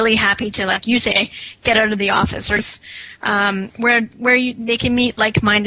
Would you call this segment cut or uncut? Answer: uncut